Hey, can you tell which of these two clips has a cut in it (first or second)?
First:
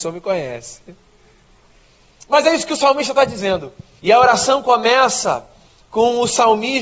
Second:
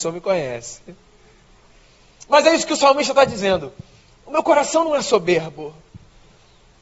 first